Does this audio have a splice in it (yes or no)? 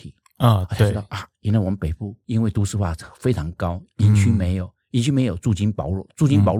no